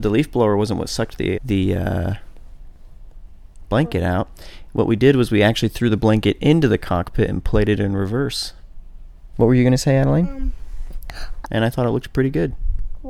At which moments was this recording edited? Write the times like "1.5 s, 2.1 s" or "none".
1.3 s, 9.3 s, 11.4 s